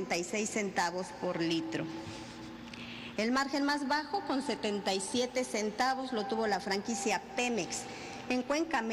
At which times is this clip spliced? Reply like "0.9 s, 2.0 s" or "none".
3.2 s

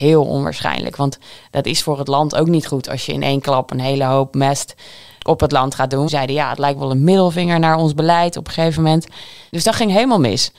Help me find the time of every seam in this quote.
6.1 s

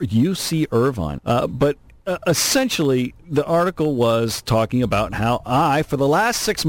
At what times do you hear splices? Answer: 1.2 s

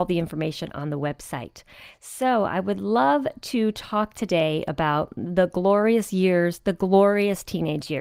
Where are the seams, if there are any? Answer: none

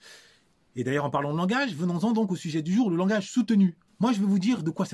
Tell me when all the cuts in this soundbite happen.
3.9 s

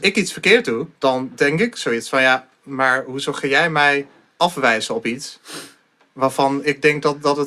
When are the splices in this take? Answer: 1.0 s

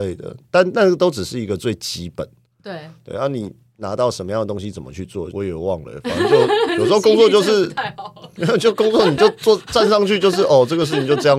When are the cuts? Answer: 5.3 s

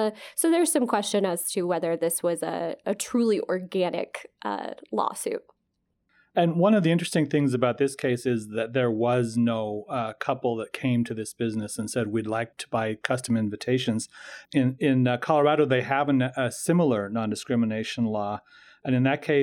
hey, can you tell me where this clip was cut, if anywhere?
12.5 s, 14.4 s

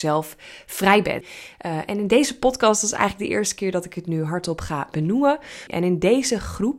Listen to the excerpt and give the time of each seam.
1.2 s, 5.7 s

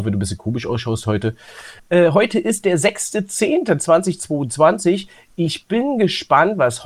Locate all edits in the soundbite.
1.8 s

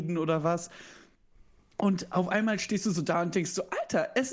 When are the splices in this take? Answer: none

